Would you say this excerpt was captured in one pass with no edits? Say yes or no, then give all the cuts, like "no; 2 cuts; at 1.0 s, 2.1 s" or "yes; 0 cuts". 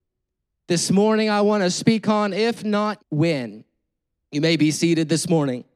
no; 1 cut; at 3.0 s